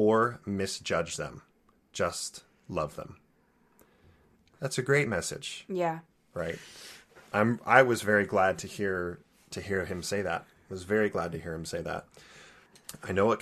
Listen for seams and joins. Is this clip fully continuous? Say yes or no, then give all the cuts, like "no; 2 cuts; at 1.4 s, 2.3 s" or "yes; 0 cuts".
yes; 0 cuts